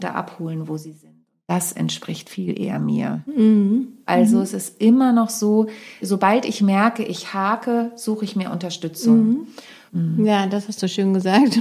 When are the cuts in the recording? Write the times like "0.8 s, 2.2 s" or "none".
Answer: 4.1 s, 6.0 s, 9.9 s